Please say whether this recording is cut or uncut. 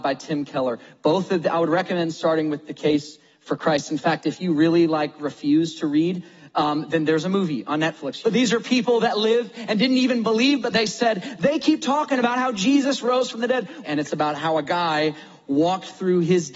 cut